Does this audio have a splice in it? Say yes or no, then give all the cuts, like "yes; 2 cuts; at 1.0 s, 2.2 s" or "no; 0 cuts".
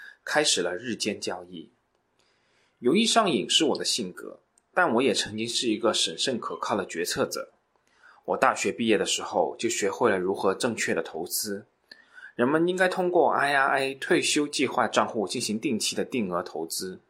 no; 0 cuts